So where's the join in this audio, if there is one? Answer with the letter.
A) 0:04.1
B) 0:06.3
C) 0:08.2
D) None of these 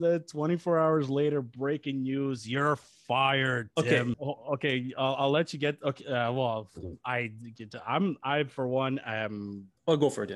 A